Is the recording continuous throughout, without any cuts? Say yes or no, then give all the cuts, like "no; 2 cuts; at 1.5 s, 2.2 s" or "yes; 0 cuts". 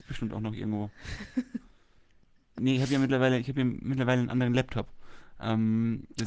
no; 1 cut; at 2.6 s